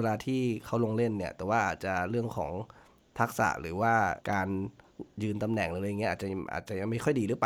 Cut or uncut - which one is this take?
cut